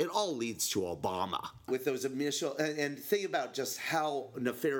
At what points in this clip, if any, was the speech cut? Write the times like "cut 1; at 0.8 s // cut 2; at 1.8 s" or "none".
cut 1; at 1.7 s